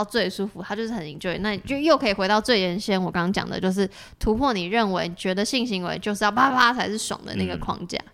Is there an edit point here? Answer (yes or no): yes